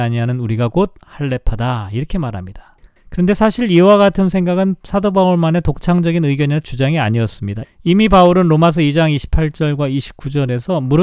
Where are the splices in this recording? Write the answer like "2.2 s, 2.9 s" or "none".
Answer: 3.0 s, 7.6 s